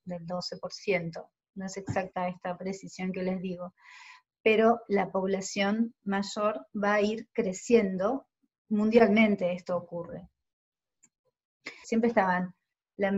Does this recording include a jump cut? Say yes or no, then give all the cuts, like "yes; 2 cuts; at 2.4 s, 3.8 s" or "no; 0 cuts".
yes; 1 cut; at 11.8 s